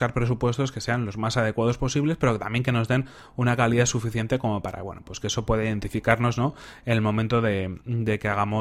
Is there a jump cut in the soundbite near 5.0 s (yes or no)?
no